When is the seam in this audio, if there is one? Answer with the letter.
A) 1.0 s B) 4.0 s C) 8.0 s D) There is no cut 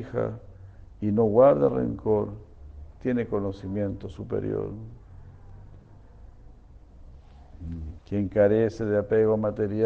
C